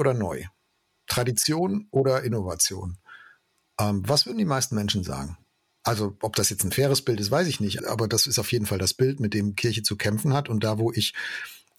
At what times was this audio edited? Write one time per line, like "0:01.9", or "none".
0:05.8
0:07.8